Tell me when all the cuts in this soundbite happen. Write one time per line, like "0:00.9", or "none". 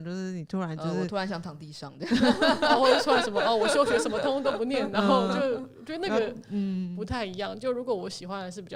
none